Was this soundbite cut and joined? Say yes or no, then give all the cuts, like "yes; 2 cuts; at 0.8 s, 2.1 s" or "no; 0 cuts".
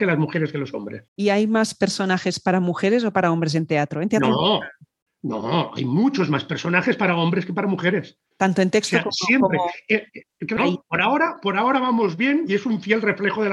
yes; 3 cuts; at 1.1 s, 8.3 s, 10.6 s